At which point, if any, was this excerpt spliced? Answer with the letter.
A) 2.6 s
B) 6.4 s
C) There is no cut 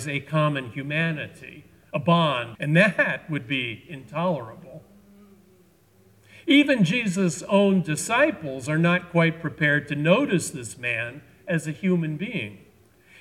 A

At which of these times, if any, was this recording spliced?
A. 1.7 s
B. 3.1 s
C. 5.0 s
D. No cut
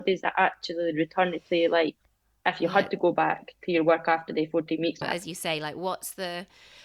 C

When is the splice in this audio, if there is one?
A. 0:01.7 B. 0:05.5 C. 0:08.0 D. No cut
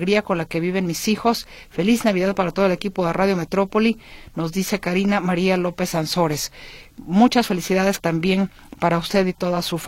C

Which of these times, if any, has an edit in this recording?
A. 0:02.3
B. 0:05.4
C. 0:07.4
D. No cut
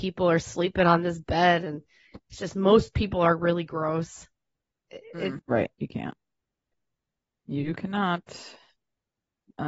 B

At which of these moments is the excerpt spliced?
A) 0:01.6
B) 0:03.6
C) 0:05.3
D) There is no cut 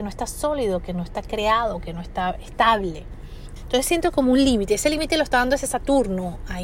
B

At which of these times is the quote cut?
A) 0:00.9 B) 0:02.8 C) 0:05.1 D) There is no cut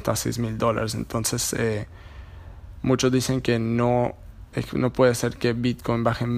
D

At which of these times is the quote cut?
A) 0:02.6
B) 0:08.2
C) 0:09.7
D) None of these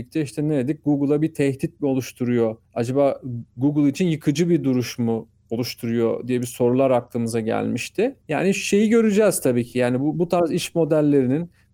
D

